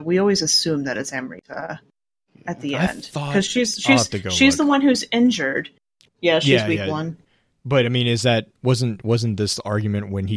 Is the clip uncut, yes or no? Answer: no